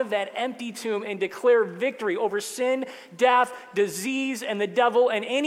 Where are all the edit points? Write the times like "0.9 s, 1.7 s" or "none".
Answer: none